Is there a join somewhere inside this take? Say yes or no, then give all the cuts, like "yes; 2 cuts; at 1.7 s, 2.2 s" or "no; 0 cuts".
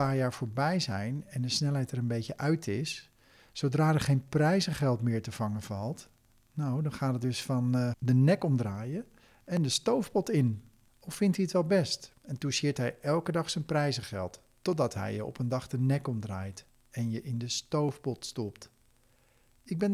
yes; 2 cuts; at 7.9 s, 10.9 s